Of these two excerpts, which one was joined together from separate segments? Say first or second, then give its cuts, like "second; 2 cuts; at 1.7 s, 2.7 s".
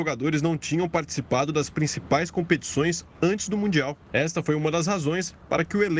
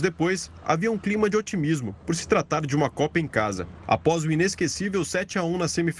second; 1 cut; at 3.8 s